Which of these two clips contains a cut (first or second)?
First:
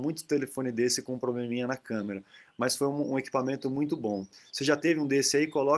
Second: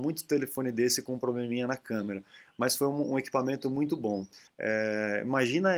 second